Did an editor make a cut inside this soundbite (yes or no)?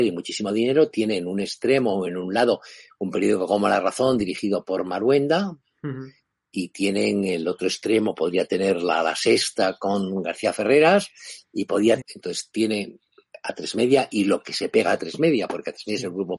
yes